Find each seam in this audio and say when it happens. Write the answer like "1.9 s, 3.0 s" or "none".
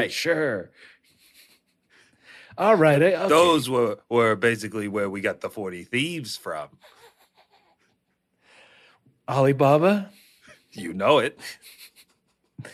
none